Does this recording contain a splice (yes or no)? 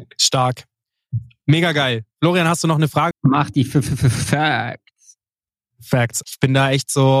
yes